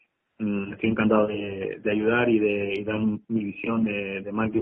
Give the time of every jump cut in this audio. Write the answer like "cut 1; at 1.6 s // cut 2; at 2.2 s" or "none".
none